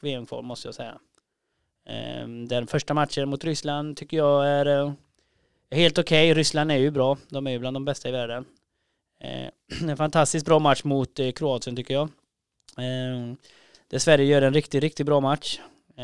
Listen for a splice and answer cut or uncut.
uncut